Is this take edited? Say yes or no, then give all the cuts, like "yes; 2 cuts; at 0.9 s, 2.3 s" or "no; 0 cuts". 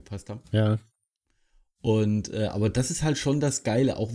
no; 0 cuts